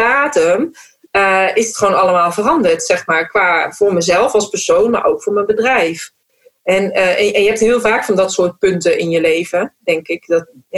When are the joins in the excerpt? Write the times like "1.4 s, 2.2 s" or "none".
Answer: none